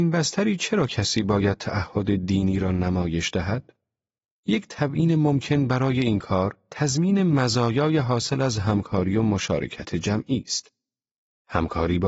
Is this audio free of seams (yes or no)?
yes